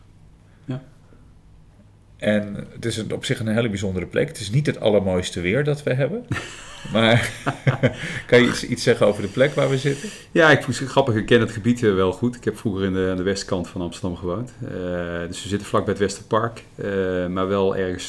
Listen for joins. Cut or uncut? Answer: uncut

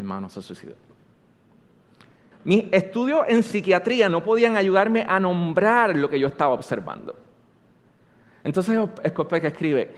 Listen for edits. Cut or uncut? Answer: cut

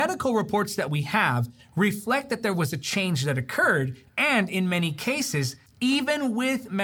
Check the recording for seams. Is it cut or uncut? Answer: cut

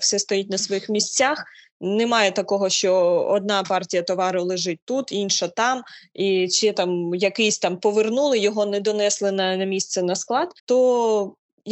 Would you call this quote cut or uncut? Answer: cut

